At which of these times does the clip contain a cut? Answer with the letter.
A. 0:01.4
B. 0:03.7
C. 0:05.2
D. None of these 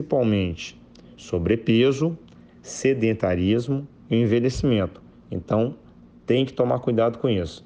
D